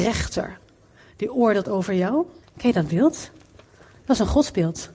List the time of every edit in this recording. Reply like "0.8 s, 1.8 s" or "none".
2.4 s